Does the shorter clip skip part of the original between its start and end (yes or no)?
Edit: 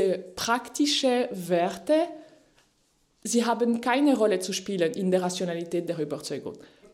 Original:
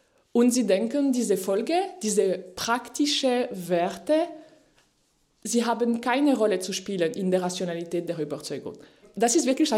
no